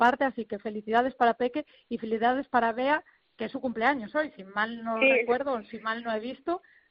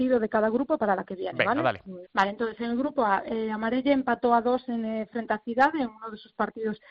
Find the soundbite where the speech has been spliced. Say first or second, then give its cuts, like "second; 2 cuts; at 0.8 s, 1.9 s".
second; 1 cut; at 2.0 s